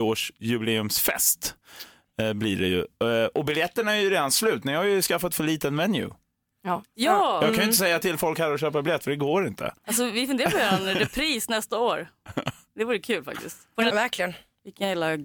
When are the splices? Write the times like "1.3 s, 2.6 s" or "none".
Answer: 9.8 s, 13.9 s